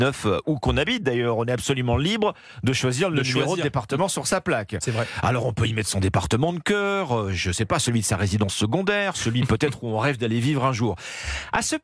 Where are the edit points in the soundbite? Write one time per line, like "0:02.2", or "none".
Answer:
none